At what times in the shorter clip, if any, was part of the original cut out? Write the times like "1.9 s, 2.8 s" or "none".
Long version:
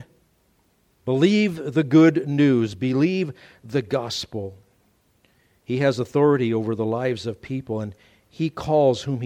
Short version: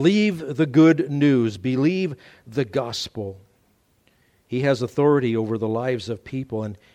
none